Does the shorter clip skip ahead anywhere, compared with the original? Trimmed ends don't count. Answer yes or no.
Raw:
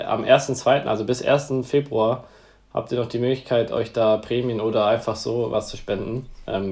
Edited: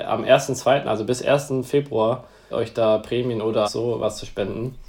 yes